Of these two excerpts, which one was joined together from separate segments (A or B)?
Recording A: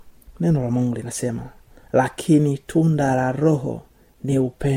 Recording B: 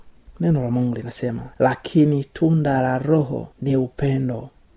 B